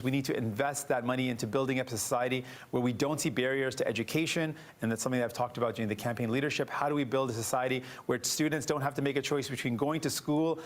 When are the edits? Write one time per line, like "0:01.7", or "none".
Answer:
none